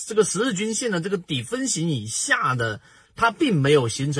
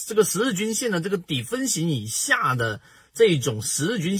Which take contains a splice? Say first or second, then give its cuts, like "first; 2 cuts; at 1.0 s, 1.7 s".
first; 1 cut; at 3.1 s